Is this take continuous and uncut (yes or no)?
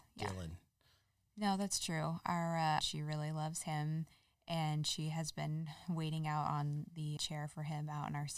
no